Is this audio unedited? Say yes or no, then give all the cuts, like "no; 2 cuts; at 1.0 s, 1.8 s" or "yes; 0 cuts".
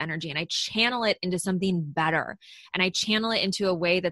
yes; 0 cuts